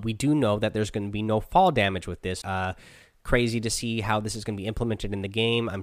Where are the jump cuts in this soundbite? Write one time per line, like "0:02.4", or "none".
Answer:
0:02.4